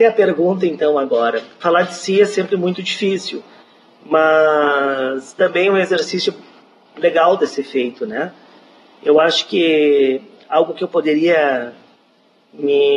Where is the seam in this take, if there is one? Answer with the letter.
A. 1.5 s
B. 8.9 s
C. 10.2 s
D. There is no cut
D